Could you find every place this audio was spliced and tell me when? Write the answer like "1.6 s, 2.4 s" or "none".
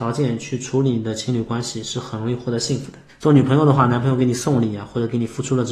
3.1 s